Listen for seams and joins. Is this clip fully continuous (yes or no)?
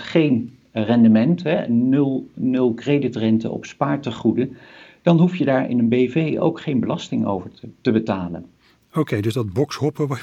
yes